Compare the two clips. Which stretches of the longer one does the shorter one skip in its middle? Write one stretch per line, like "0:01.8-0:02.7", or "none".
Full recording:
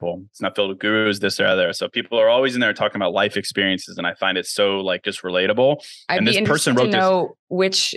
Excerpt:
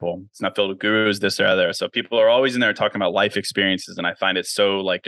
none